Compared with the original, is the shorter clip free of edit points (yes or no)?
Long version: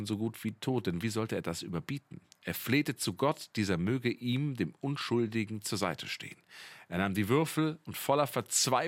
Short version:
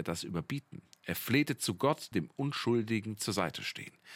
no